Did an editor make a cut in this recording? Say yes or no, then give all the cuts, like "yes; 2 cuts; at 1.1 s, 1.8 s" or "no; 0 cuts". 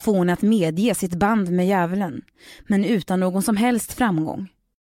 no; 0 cuts